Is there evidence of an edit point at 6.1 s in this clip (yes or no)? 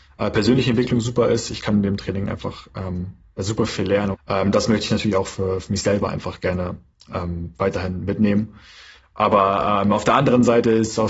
no